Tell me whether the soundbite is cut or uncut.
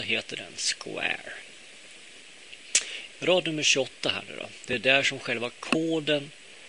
cut